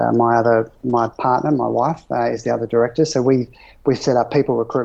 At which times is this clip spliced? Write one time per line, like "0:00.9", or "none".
none